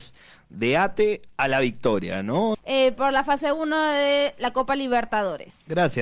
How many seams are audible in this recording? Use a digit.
1